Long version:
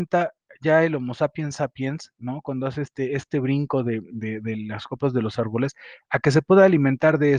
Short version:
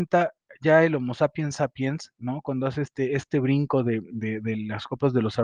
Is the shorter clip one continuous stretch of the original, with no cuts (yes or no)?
yes